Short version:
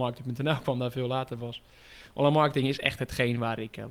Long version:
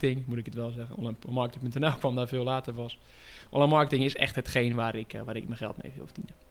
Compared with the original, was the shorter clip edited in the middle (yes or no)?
no